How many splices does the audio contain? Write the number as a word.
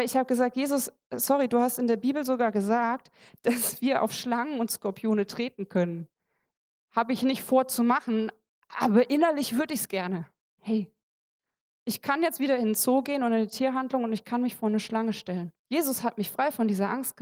two